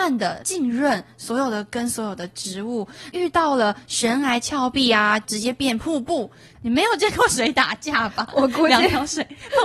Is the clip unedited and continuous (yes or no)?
no